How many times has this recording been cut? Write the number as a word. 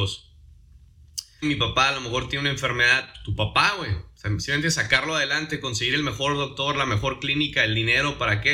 one